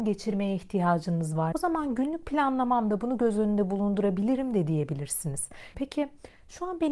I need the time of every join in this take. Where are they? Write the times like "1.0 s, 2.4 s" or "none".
1.5 s, 5.7 s